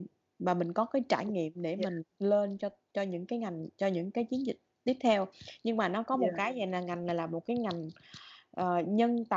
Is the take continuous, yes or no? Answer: yes